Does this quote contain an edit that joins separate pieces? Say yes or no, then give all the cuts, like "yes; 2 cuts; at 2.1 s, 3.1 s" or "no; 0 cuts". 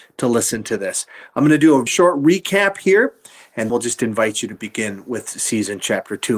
yes; 2 cuts; at 1.9 s, 3.7 s